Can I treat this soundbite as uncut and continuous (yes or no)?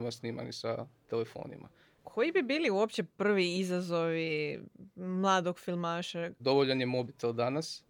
no